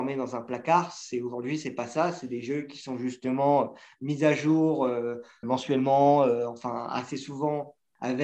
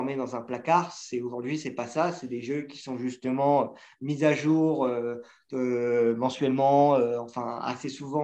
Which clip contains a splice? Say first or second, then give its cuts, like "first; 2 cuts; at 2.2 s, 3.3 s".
first; 1 cut; at 5.4 s